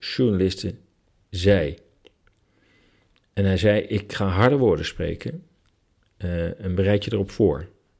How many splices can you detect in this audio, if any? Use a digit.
0